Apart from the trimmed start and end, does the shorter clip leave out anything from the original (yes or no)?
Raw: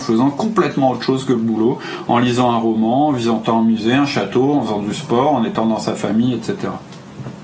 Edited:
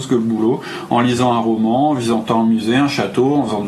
no